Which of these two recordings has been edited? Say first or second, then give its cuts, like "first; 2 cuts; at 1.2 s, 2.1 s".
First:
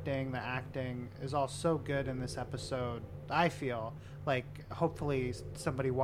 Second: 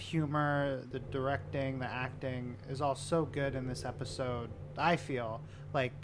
second; 1 cut; at 0.9 s